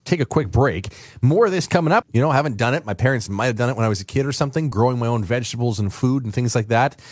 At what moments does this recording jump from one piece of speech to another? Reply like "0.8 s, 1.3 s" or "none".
2.0 s, 4.7 s